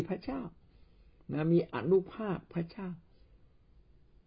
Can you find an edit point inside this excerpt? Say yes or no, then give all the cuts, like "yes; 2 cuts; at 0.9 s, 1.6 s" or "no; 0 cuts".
no; 0 cuts